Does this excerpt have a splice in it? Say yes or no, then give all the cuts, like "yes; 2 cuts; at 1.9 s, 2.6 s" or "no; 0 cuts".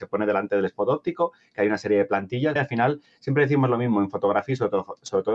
yes; 1 cut; at 2.6 s